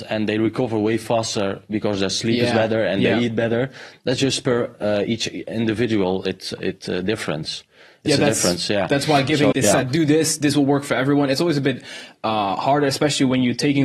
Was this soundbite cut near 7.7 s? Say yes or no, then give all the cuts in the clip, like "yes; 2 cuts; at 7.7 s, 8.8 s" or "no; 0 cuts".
no; 1 cut; at 9.5 s